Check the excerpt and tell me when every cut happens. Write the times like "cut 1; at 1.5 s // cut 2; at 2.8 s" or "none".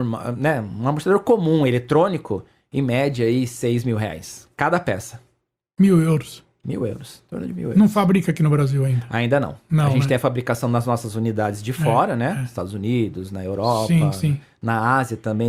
none

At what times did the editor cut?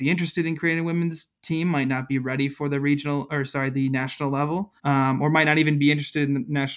cut 1; at 4.8 s

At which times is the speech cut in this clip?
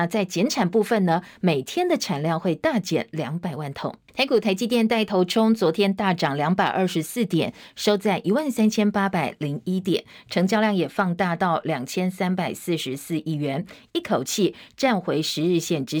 none

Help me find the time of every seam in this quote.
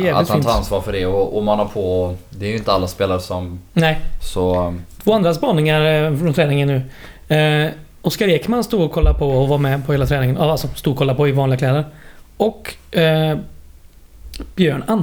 cut 1; at 4.2 s

